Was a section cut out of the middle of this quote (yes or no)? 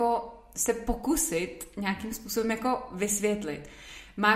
no